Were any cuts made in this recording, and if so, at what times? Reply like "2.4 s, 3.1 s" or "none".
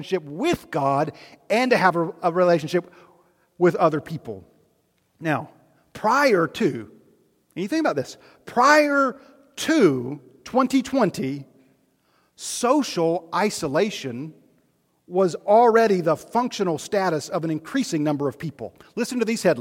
none